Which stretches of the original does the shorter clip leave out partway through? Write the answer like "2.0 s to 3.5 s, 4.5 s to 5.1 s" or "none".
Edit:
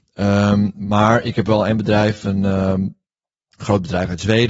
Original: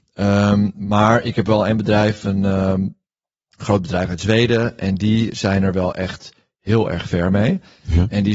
none